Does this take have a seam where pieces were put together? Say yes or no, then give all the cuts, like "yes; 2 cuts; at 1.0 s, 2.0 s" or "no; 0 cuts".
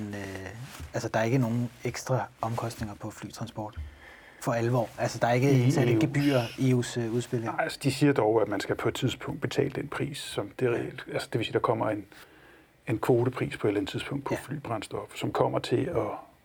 no; 0 cuts